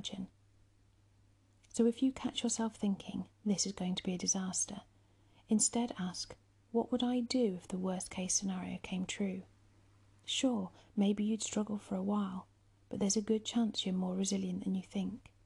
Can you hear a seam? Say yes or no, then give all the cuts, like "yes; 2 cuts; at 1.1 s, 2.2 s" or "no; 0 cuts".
no; 0 cuts